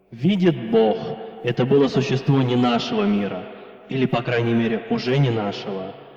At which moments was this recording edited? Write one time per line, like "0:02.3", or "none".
none